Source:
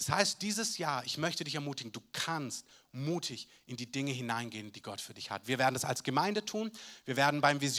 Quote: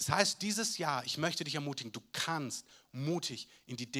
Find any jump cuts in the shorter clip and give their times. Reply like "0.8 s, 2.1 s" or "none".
none